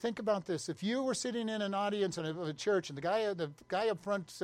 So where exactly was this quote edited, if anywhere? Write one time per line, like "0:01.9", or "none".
none